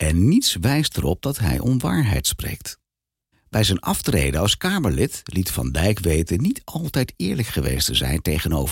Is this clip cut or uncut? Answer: cut